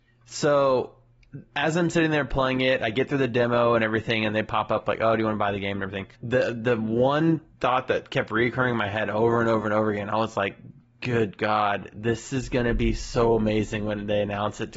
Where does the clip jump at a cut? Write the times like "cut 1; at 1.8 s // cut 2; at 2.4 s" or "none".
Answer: cut 1; at 6.1 s